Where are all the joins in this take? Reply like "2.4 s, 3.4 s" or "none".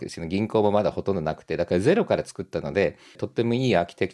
3.2 s